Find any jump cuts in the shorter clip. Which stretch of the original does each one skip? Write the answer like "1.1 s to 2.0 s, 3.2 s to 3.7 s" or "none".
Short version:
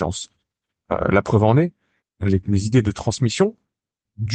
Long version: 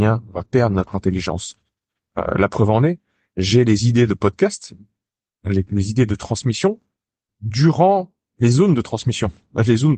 3.3 s to 5.3 s